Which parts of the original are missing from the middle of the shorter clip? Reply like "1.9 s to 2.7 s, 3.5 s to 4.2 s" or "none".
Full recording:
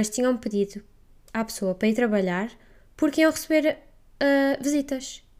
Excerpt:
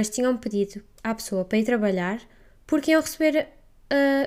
0.9 s to 1.2 s